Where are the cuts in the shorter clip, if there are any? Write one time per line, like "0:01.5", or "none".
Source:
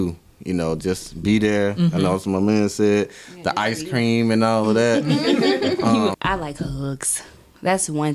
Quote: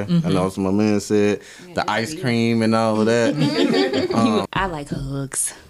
none